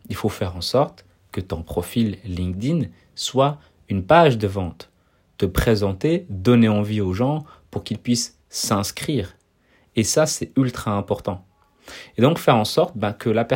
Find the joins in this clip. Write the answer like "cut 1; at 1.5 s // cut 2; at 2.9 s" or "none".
none

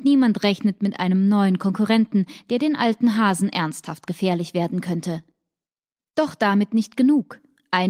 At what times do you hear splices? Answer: none

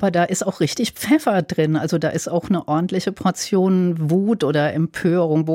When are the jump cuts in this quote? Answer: none

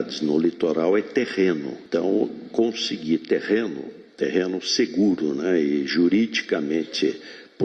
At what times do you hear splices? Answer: none

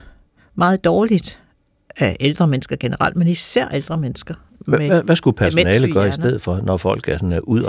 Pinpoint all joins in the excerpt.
none

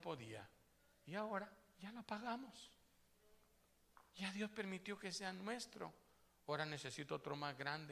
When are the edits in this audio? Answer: none

